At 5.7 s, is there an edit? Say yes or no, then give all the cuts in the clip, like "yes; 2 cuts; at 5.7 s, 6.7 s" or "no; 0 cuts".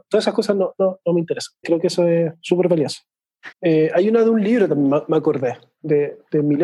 no; 2 cuts; at 1.6 s, 3.5 s